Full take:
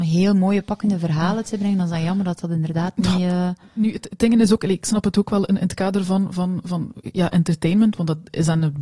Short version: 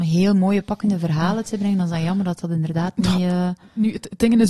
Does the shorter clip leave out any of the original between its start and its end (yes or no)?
no